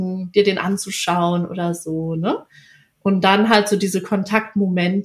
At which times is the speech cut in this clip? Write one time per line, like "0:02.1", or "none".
none